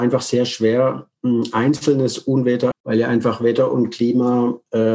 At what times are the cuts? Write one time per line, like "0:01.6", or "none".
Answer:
0:02.7